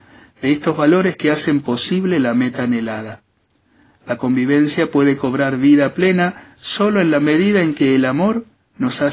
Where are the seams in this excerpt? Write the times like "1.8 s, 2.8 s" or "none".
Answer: none